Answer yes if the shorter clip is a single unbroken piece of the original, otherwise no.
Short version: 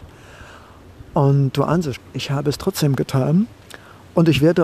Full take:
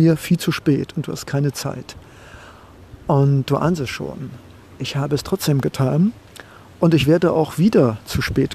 no